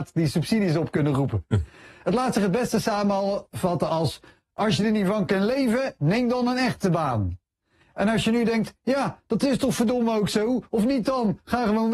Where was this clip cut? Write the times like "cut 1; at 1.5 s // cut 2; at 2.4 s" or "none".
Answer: none